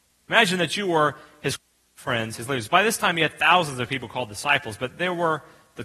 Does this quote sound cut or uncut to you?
cut